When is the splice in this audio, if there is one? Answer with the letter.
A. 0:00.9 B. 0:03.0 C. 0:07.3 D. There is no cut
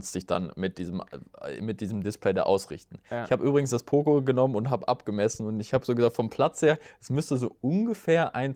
D